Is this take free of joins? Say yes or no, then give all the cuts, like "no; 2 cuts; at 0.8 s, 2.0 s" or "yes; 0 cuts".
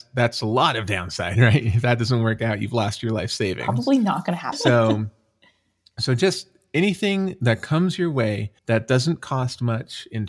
no; 2 cuts; at 4.5 s, 8.6 s